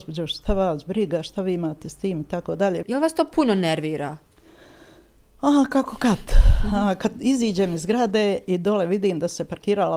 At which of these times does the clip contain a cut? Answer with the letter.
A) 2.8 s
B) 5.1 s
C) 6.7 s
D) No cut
A